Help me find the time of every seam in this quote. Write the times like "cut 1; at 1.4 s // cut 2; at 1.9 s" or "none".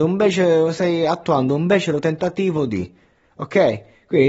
none